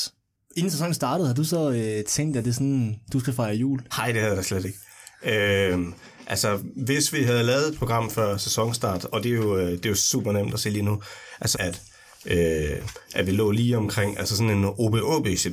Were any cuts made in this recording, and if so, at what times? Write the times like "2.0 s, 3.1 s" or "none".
3.9 s, 11.5 s